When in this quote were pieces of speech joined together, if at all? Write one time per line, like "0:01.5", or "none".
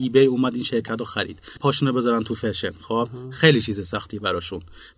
0:01.6